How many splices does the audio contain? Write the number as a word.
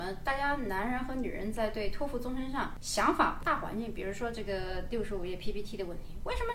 zero